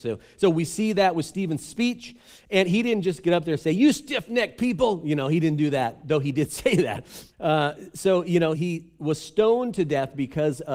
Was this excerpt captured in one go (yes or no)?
no